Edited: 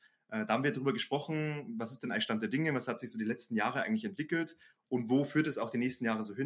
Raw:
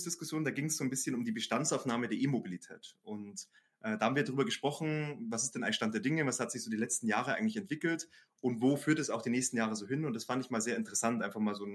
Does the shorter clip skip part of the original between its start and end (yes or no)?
no